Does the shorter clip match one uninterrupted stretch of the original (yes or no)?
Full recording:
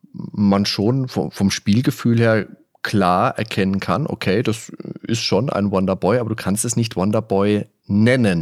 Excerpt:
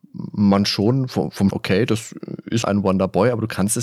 no